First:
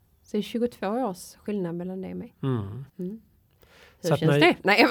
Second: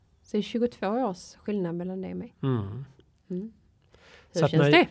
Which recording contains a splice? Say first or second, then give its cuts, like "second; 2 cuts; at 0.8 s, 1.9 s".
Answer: first; 1 cut; at 2.9 s